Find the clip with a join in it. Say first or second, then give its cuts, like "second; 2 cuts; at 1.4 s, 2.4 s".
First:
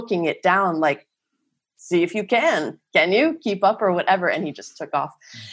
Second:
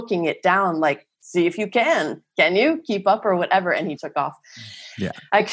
second; 2 cuts; at 1.1 s, 4.0 s